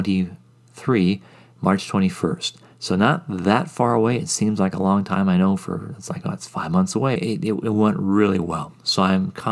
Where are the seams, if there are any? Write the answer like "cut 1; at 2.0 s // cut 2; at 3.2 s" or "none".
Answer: cut 1; at 7.2 s